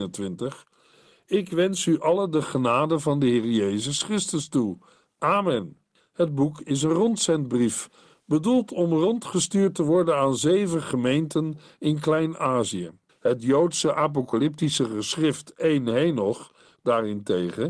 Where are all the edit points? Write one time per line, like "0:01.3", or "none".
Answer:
0:06.0
0:13.1